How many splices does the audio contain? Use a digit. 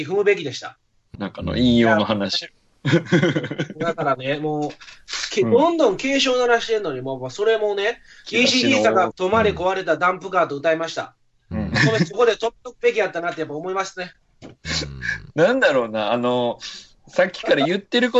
2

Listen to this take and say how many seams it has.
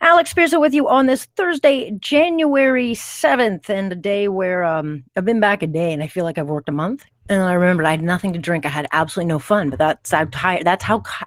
2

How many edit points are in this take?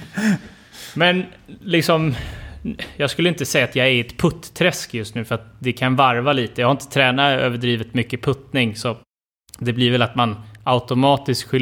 0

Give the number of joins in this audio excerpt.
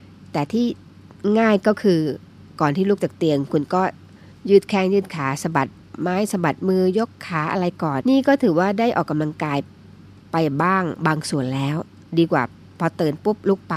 1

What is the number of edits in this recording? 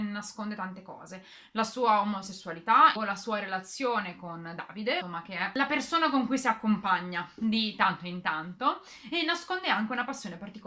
2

